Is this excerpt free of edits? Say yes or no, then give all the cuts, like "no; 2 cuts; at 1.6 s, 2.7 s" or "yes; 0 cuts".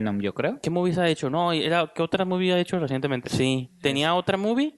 no; 1 cut; at 3.2 s